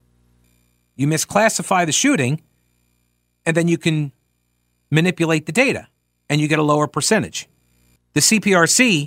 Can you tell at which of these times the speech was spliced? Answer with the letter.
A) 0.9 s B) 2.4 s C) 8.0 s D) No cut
C